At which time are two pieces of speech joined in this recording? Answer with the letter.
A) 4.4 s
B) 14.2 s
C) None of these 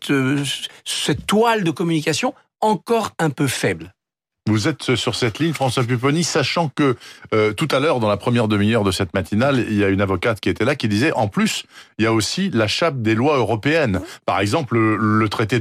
C